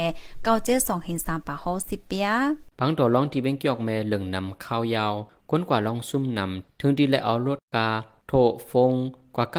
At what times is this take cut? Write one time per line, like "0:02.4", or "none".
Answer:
0:02.7